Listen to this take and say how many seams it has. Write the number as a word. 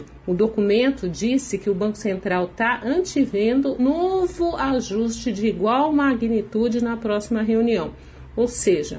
one